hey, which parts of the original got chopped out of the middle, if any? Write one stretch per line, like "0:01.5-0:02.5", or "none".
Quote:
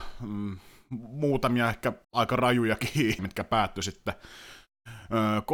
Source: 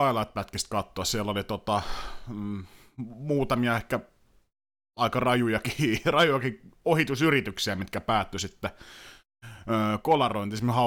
0:04.1-0:04.9
0:06.0-0:07.8